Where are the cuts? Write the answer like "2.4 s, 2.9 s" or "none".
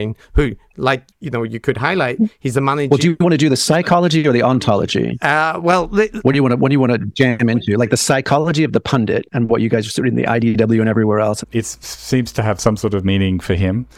11.4 s